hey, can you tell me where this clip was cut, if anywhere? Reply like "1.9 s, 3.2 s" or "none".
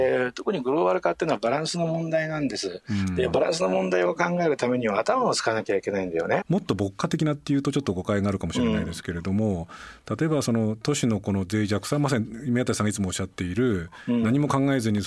6.4 s

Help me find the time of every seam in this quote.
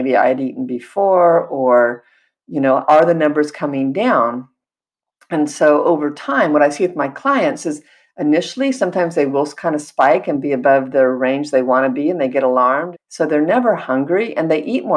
12.9 s

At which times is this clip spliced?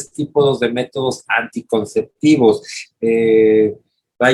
2.8 s

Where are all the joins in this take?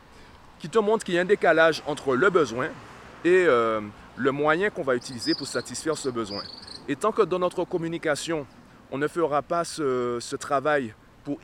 none

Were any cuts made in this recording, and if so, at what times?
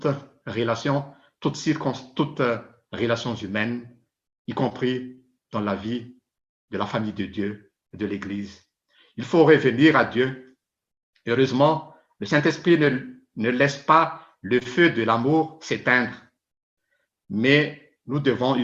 none

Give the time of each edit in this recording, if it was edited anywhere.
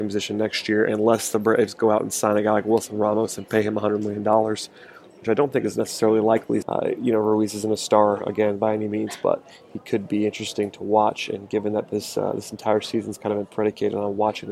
6.6 s

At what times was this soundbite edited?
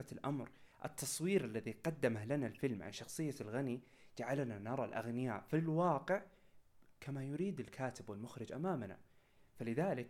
none

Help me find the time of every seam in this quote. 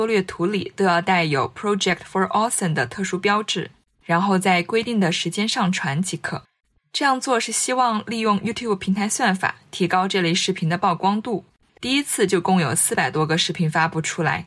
11.7 s

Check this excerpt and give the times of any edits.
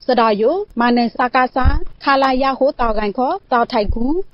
1.1 s

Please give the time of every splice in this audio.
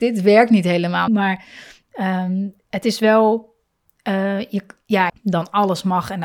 1.1 s, 5.1 s

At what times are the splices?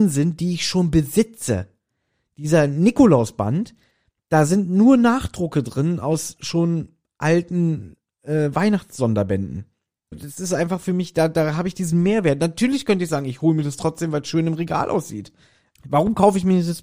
10.1 s, 15.8 s

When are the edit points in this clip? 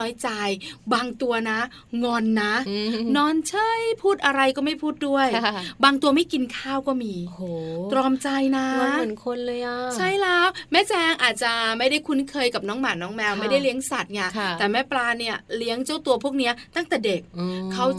none

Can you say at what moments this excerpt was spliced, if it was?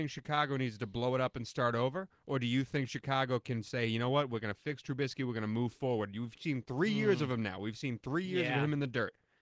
none

